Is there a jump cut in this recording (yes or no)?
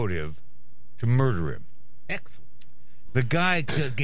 yes